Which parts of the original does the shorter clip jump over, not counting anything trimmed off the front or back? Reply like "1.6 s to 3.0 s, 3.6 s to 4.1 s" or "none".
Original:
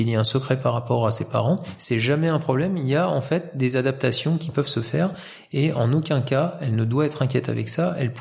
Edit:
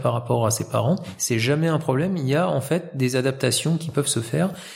none